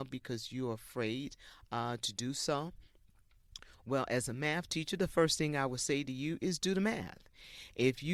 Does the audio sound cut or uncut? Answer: uncut